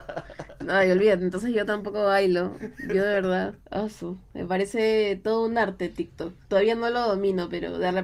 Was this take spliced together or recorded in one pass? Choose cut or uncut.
cut